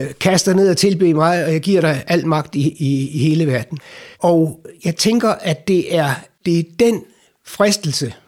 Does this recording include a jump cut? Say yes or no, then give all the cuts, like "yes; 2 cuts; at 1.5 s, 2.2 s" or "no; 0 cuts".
yes; 1 cut; at 4.1 s